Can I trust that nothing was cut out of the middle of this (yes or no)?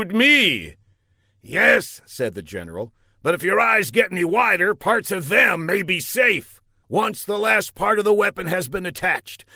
no